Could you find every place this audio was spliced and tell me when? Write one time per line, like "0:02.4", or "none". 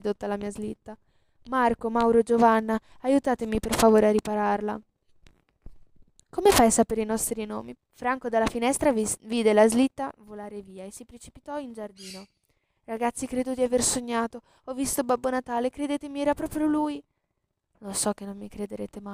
0:07.7